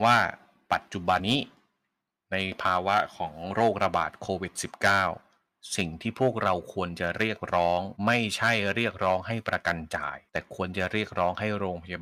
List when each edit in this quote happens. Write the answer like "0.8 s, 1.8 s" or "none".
1.2 s, 8.0 s, 10.3 s